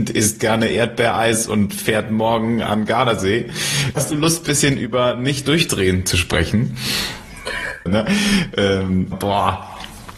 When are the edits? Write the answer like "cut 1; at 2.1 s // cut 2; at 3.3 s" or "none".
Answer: cut 1; at 4.0 s // cut 2; at 7.9 s // cut 3; at 9.1 s